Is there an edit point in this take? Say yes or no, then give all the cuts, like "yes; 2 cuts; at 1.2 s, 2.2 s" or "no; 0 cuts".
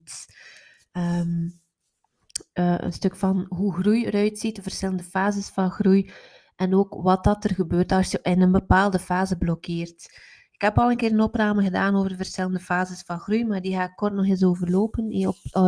yes; 1 cut; at 2.5 s